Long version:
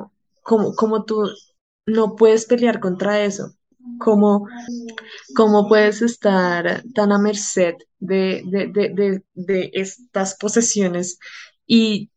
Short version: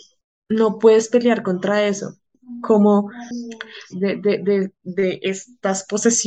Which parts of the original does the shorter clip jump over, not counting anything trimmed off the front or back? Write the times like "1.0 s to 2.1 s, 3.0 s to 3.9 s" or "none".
5.3 s to 8.4 s